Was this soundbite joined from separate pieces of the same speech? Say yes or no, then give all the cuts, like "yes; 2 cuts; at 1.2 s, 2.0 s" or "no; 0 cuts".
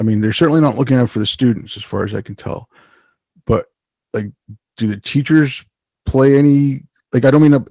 no; 0 cuts